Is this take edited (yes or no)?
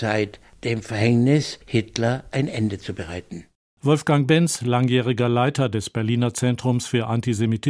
no